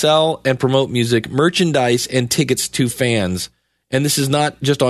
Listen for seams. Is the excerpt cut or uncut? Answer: uncut